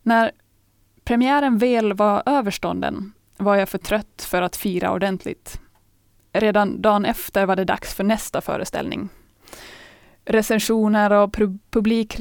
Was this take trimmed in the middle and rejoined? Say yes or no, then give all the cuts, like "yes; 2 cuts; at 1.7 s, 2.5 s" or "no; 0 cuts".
no; 0 cuts